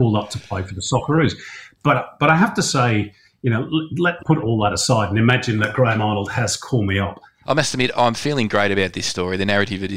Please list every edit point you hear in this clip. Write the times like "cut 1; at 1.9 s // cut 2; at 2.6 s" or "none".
cut 1; at 4.2 s // cut 2; at 7.4 s